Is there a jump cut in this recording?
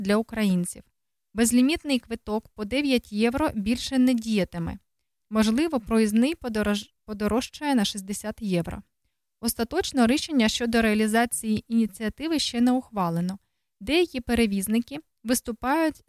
yes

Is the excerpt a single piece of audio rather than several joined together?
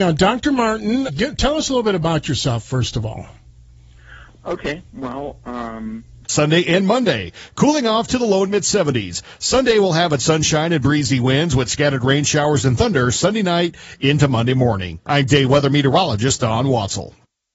no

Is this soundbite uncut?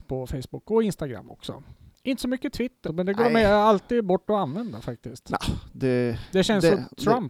no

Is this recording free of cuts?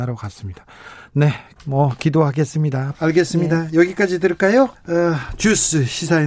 no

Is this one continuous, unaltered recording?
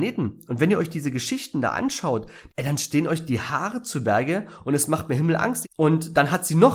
no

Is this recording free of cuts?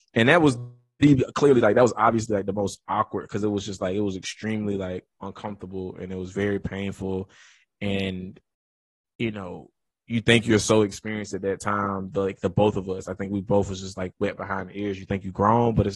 yes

